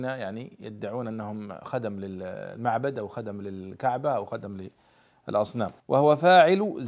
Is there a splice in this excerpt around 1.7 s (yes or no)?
no